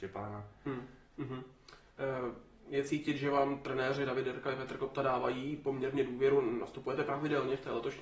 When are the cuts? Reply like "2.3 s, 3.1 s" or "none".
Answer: 1.1 s